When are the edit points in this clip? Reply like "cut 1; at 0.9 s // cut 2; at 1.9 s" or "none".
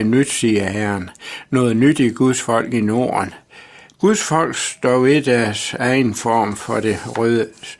cut 1; at 3.9 s

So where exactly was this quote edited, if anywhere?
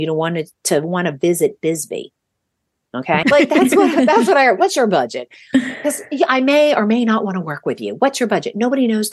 cut 1; at 3.2 s

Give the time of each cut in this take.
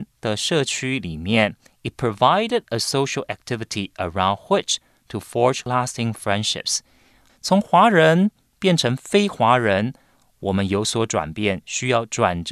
cut 1; at 7.3 s

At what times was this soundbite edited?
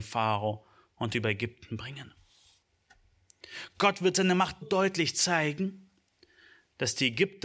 cut 1; at 4.6 s

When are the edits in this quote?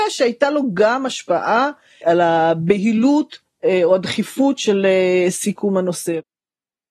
cut 1; at 2.0 s

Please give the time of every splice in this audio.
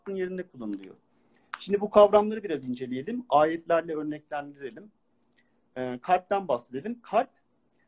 none

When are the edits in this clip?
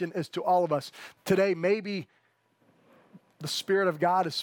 cut 1; at 1.2 s

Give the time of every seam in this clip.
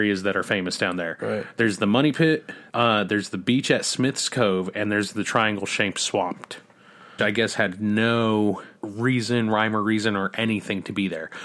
cut 1; at 2.7 s // cut 2; at 7.2 s // cut 3; at 8.8 s

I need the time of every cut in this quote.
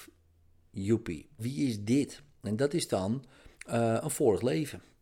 cut 1; at 1.4 s // cut 2; at 3.5 s

